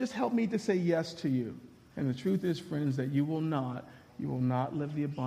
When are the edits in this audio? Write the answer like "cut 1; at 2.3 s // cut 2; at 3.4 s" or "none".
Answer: cut 1; at 1.9 s // cut 2; at 4.1 s